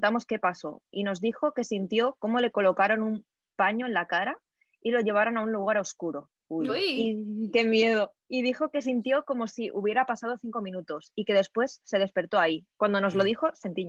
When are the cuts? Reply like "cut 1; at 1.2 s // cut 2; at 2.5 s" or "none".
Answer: cut 1; at 6.7 s

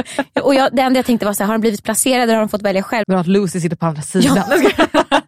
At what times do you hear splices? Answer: cut 1; at 3.0 s

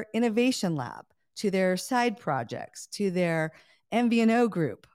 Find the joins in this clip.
none

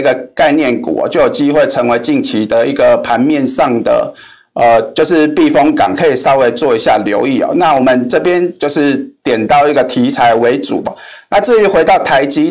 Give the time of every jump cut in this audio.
none

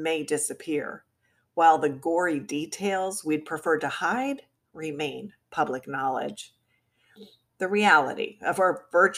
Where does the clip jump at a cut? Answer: none

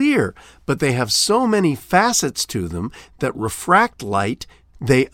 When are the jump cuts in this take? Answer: none

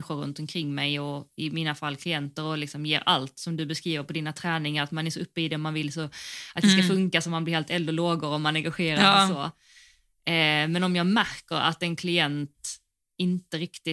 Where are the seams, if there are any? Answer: none

